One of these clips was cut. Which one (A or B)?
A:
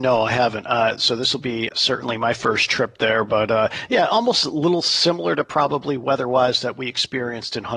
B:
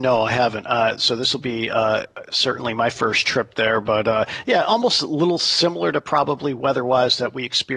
A